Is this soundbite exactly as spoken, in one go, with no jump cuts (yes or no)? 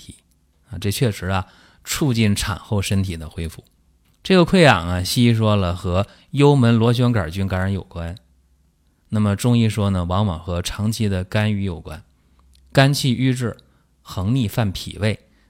no